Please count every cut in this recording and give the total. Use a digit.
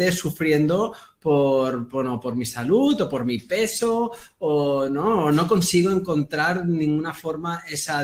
1